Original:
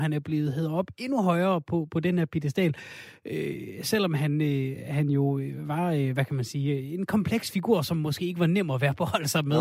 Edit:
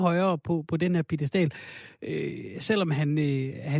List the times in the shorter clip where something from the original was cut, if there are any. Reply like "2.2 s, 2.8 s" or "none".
none